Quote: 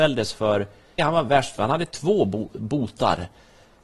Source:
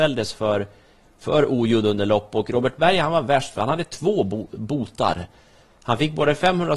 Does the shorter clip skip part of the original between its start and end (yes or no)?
yes